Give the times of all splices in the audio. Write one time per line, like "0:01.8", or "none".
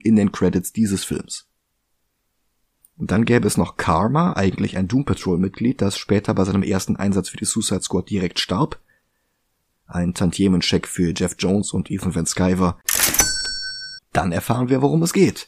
0:09.8
0:14.0